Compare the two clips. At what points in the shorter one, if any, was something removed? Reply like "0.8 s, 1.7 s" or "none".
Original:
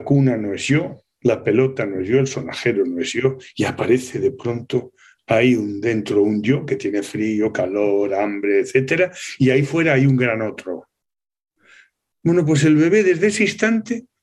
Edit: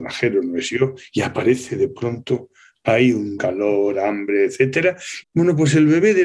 3.4 s, 5.2 s